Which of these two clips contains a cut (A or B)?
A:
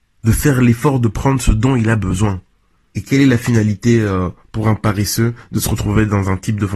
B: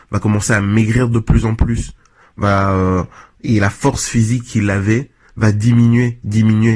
A